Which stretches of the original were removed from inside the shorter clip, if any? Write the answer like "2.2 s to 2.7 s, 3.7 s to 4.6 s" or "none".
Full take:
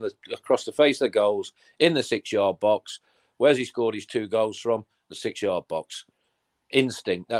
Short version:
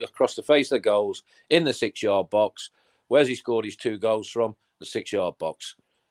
none